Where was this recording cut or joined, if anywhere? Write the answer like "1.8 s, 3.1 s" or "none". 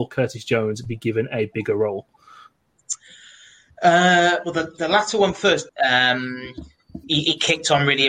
5.7 s, 7.0 s